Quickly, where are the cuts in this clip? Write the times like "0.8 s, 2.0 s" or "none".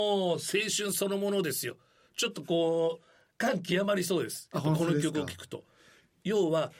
none

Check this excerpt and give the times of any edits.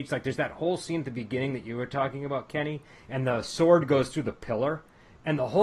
none

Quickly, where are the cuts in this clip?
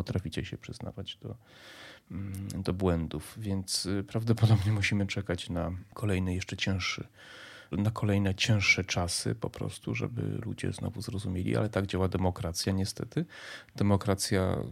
7.7 s

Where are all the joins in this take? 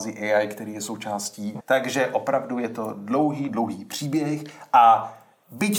1.6 s, 3.5 s

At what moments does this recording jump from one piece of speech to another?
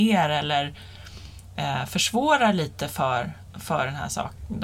none

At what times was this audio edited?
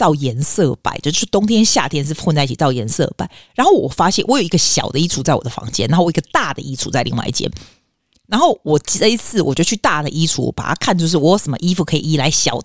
none

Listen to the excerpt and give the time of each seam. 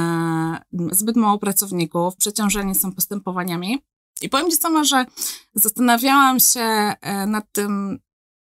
0.9 s, 2.2 s

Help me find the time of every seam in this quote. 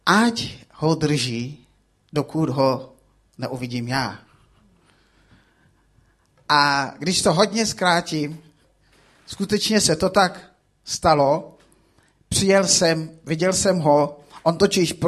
none

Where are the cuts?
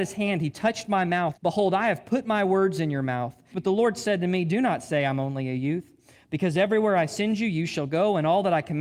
1.3 s, 3.5 s

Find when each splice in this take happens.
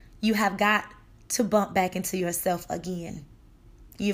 none

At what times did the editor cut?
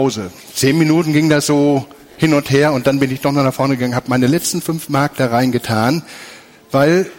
none

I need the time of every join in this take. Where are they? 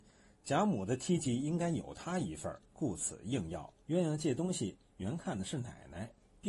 2.7 s, 3.9 s

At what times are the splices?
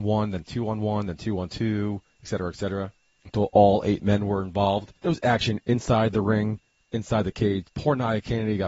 5.0 s, 7.6 s

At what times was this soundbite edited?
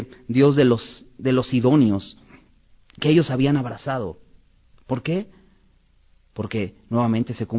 none

